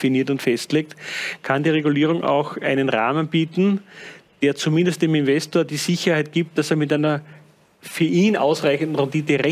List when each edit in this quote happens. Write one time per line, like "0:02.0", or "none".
none

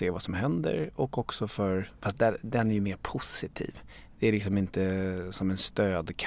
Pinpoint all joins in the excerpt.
none

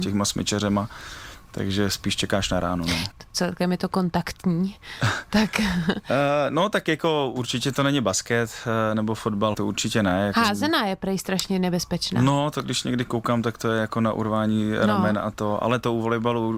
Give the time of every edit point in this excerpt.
0:03.1
0:09.5

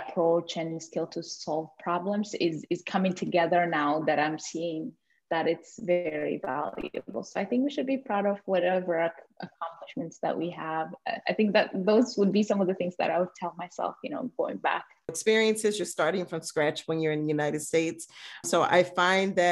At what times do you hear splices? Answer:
0:15.1
0:18.4

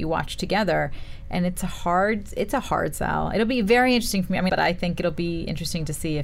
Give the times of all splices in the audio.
0:04.5

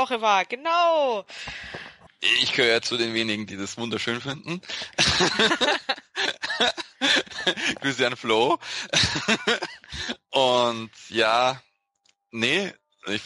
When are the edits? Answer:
0:02.1

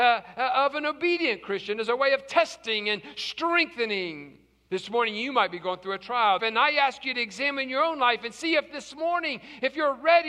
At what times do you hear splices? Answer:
0:04.7
0:06.4

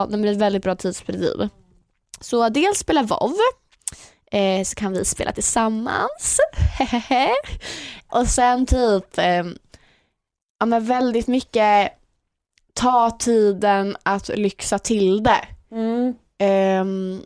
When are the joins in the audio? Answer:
0:08.1

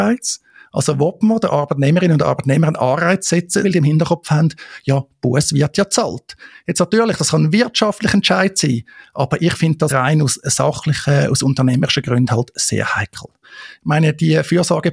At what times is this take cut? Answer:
0:03.6
0:09.9
0:13.4

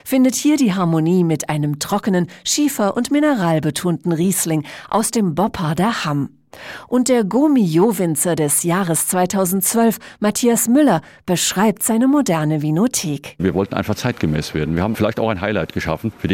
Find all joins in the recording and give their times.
none

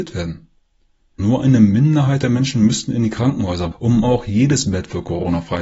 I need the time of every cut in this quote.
0:01.2
0:03.7

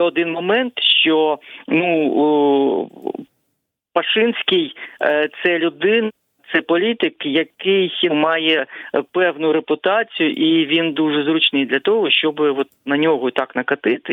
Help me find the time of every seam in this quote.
0:08.1

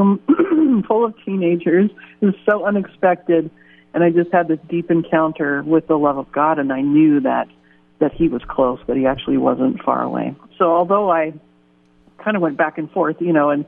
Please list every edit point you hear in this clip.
0:10.5

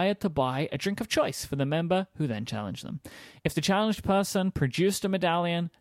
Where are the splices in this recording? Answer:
none

